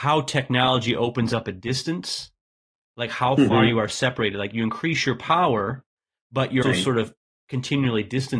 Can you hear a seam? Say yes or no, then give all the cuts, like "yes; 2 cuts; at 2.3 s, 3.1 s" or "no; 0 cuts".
yes; 1 cut; at 6.6 s